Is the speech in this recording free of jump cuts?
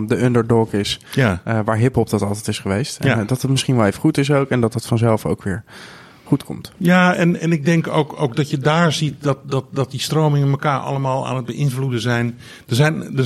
yes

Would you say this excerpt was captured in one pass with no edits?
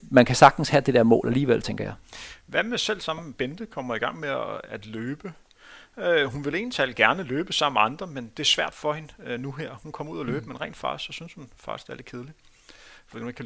yes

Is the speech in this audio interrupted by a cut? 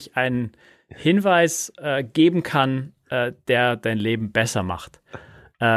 no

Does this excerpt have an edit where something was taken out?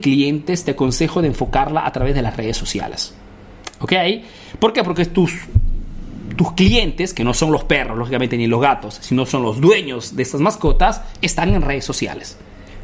no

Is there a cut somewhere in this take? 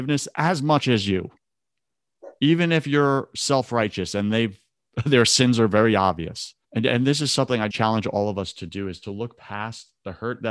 yes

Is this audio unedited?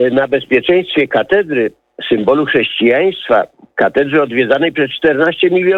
yes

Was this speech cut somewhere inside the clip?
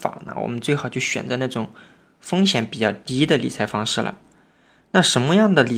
no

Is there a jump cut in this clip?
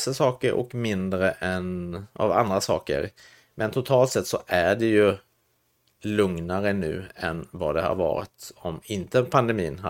no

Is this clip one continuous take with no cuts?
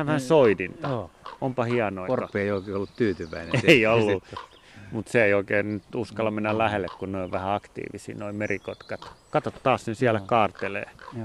no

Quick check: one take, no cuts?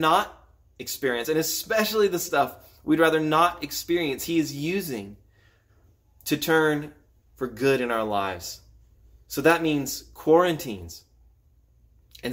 yes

